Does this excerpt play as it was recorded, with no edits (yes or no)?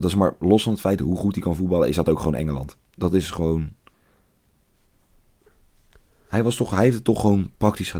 yes